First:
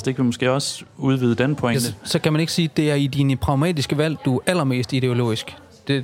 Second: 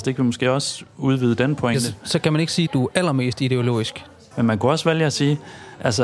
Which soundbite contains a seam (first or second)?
second